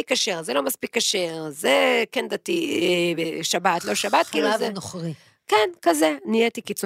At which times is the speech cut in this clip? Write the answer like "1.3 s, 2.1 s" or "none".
none